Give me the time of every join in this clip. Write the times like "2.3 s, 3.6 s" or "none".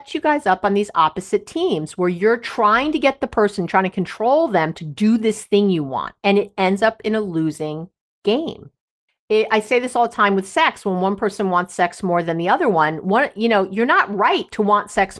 9.1 s